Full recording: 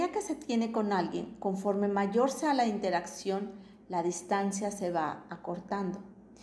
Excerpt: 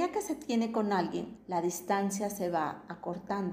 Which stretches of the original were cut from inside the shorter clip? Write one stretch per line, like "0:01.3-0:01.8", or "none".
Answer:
0:01.4-0:03.8